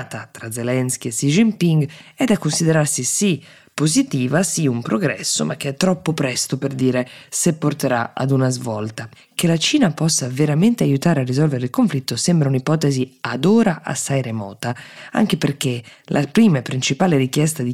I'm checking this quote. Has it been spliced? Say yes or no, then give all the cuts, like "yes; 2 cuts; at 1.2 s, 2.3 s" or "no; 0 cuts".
no; 0 cuts